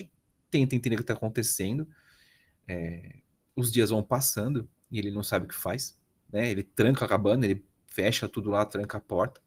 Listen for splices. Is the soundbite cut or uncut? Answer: uncut